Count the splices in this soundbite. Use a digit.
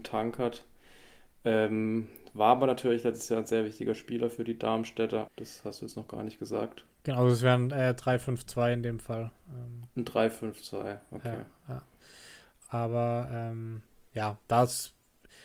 1